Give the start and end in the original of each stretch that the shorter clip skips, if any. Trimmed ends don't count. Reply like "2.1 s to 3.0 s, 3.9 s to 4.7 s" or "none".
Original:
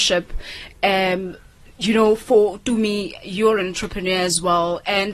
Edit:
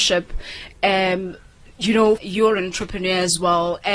2.2 s to 3.2 s